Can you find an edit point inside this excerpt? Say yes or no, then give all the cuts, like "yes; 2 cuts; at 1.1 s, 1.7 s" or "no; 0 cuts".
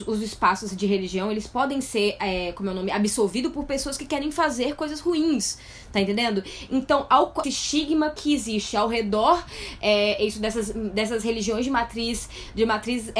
yes; 1 cut; at 7.4 s